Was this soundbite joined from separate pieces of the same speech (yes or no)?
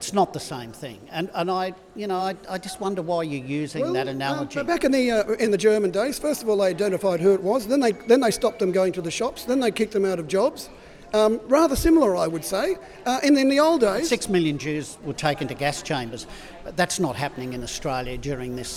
no